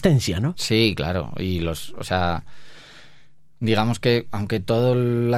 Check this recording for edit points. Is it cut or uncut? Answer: uncut